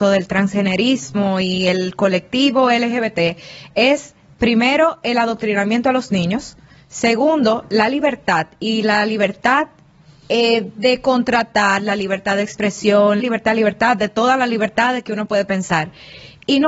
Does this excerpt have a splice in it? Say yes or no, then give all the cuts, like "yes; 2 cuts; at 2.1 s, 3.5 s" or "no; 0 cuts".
yes; 1 cut; at 13.2 s